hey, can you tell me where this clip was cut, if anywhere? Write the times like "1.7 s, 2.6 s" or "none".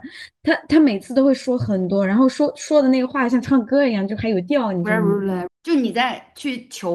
5.5 s